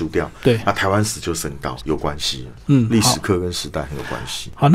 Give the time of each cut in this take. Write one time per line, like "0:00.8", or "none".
0:01.8